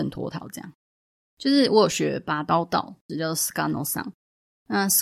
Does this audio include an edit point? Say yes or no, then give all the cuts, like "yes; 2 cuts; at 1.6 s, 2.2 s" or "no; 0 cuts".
yes; 2 cuts; at 1.3 s, 3.1 s